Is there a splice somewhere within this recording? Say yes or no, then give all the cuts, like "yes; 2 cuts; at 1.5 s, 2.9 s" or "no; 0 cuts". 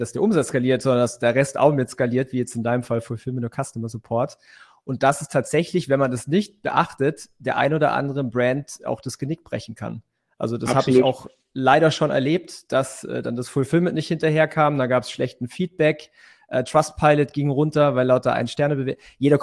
no; 0 cuts